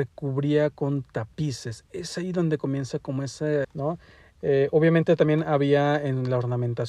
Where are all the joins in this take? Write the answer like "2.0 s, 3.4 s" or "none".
3.6 s